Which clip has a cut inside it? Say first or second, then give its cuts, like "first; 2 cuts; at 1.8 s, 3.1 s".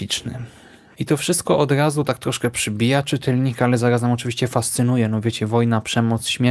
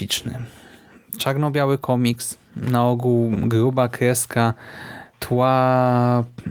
first; 1 cut; at 0.9 s